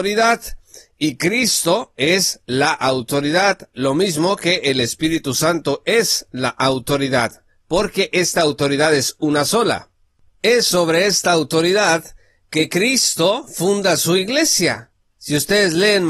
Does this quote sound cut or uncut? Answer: uncut